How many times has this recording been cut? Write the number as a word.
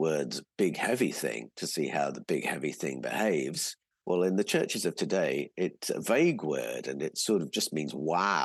two